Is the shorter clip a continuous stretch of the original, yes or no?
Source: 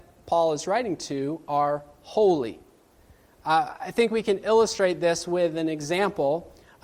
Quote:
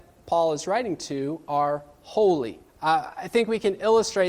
no